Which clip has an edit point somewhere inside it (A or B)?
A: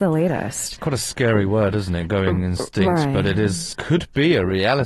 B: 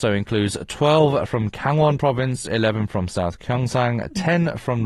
A